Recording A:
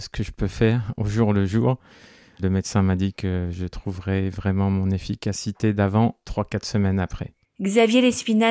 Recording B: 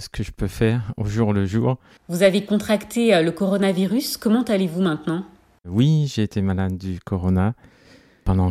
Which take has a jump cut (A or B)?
B